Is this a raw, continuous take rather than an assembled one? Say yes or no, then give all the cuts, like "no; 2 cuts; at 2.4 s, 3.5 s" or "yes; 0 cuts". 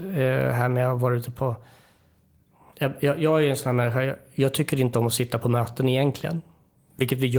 yes; 0 cuts